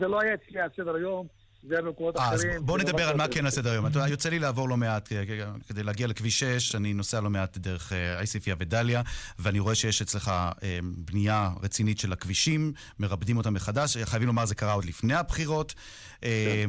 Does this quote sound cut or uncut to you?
uncut